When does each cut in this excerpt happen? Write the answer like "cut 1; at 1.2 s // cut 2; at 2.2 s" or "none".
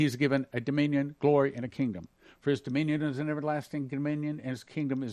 none

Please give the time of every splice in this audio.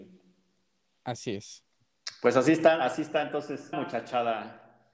cut 1; at 3.7 s

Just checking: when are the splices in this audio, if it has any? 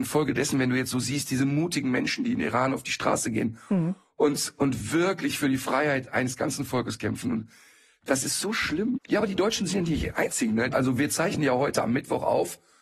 cut 1; at 8.9 s // cut 2; at 10.7 s

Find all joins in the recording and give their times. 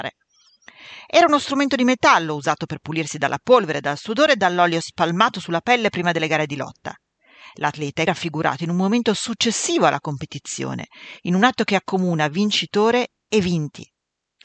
cut 1; at 8.1 s

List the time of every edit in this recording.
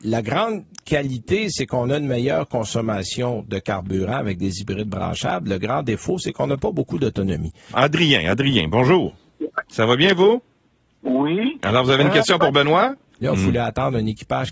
cut 1; at 7.7 s // cut 2; at 9.7 s // cut 3; at 13.2 s

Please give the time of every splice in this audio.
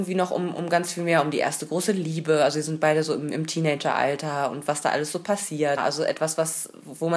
cut 1; at 5.8 s

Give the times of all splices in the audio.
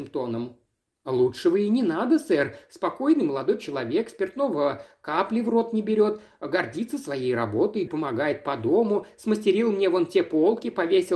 cut 1; at 7.9 s

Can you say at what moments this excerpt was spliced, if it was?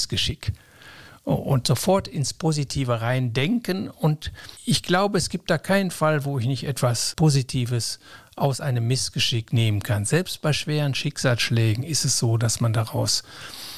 none

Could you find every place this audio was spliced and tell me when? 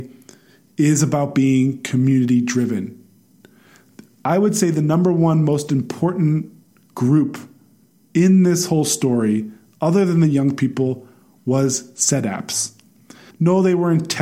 cut 1; at 13.3 s

